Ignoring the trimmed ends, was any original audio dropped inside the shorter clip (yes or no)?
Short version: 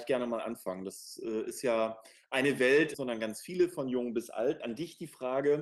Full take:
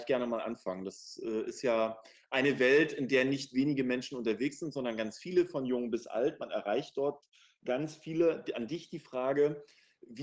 yes